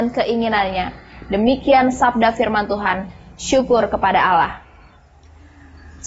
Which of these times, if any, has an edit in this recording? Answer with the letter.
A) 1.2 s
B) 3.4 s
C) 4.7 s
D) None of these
D